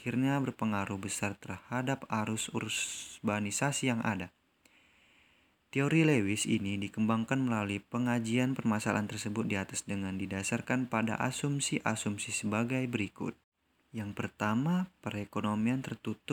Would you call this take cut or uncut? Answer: uncut